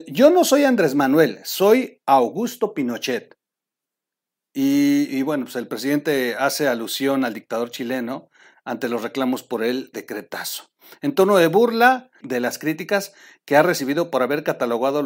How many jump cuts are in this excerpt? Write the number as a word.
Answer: two